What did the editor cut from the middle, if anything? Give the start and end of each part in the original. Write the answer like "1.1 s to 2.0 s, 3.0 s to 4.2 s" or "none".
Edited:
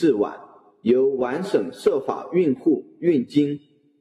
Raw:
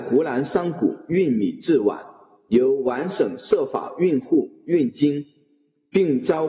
none